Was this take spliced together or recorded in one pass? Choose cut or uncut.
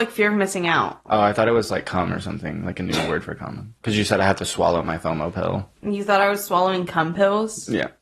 cut